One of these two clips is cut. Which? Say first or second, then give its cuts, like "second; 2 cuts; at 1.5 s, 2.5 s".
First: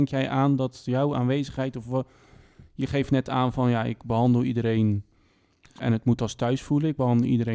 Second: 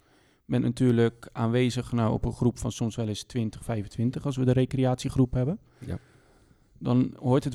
first; 1 cut; at 5.8 s